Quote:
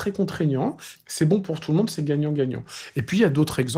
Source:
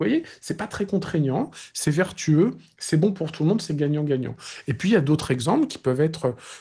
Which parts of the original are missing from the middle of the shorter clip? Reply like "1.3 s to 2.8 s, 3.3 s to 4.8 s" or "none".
1.7 s to 2.7 s